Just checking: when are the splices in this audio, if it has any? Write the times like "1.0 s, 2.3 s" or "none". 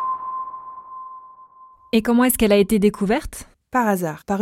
none